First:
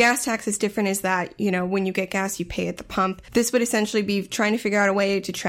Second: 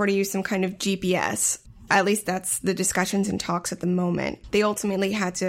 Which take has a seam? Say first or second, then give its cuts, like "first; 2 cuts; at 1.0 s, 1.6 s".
second; 1 cut; at 4.5 s